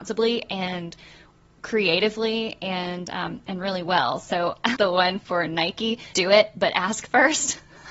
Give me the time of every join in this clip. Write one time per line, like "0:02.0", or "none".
0:04.7
0:06.1